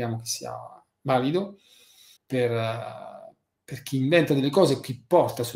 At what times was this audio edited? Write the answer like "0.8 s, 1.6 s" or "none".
2.2 s